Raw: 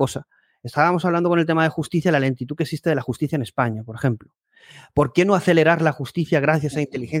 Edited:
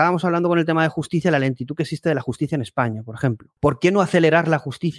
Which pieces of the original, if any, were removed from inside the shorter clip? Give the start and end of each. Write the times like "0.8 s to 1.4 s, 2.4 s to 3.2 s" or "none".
4.4 s to 4.9 s